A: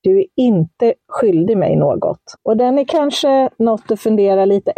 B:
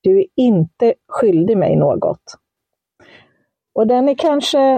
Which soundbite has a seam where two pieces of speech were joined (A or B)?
A